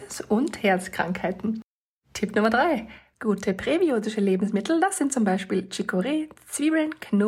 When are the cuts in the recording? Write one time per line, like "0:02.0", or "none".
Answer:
0:03.1